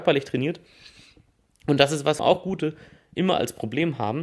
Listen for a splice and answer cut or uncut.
cut